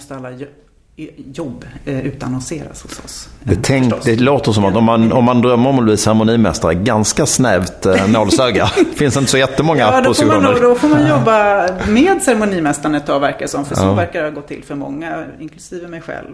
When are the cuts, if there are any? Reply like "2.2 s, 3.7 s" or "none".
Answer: none